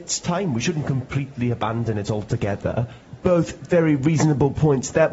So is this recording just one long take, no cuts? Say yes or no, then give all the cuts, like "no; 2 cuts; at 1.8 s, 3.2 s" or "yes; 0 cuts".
yes; 0 cuts